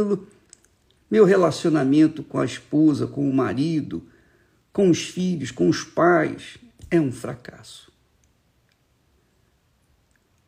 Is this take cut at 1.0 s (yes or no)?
yes